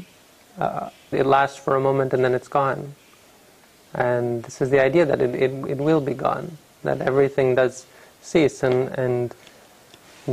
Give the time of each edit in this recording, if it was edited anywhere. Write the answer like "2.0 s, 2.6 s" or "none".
1.1 s